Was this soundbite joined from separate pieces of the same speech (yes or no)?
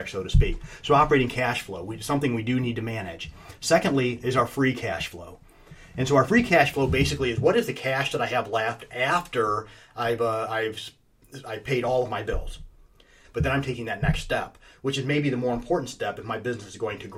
yes